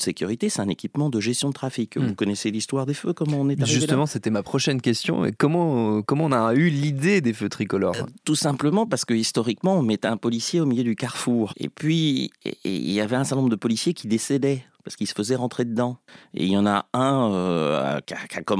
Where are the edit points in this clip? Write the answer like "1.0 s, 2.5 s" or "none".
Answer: 11.5 s